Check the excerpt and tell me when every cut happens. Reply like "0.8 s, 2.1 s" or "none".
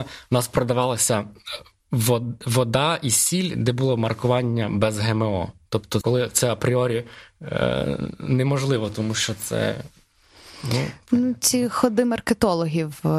6.0 s